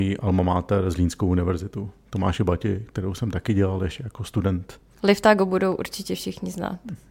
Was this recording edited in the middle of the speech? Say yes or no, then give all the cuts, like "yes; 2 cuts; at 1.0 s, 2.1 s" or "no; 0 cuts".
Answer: no; 0 cuts